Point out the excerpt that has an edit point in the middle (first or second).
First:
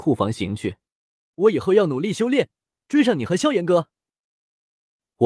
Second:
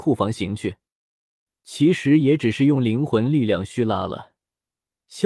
first